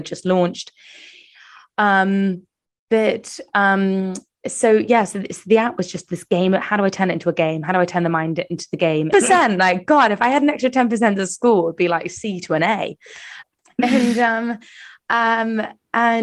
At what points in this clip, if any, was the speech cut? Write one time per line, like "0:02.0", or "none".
0:09.1
0:13.4

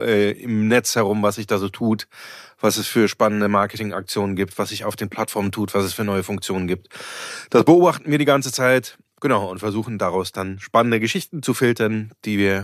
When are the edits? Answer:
none

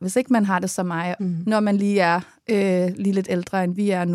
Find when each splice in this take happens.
0:01.2

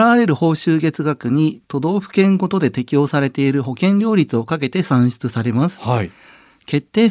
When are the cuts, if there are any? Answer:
none

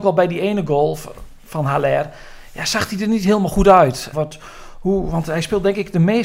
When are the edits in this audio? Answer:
0:04.1

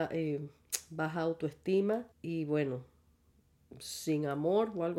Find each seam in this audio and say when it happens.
0:02.1

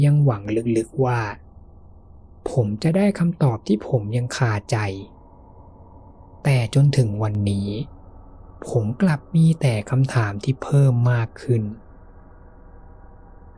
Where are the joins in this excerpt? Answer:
none

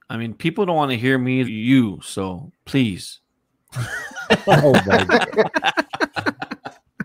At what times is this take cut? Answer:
0:01.4
0:02.6

